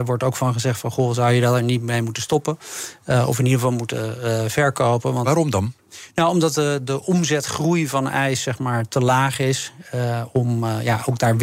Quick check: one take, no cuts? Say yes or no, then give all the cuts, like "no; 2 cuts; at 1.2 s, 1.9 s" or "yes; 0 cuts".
yes; 0 cuts